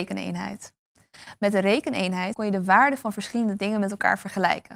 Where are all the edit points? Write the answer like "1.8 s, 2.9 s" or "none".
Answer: 2.3 s